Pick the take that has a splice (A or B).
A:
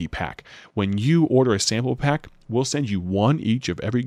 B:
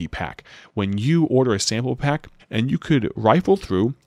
B